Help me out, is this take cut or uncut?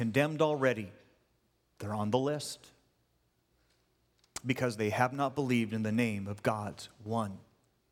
uncut